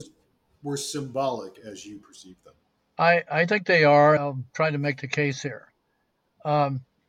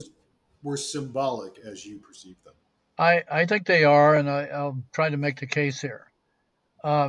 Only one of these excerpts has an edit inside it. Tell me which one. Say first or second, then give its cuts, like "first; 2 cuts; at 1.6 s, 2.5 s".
first; 1 cut; at 4.2 s